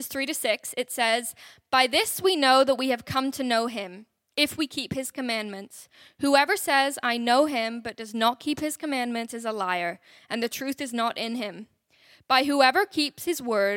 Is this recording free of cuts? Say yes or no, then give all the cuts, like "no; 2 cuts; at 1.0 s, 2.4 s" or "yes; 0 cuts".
yes; 0 cuts